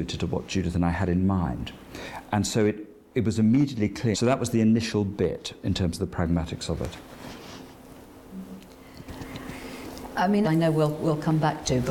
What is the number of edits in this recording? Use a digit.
2